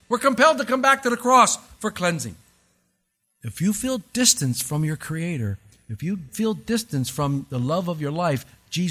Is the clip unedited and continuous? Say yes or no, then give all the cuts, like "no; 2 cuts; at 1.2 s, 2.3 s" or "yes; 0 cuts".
no; 1 cut; at 3.2 s